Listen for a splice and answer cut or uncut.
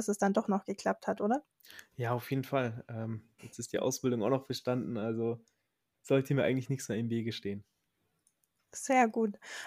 cut